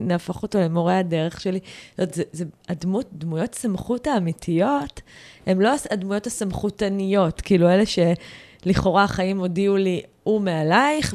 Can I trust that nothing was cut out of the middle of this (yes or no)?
yes